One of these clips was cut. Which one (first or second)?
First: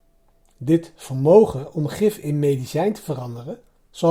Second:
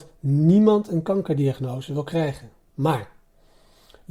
second